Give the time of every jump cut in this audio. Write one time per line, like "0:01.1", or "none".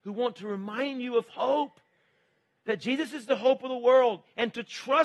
none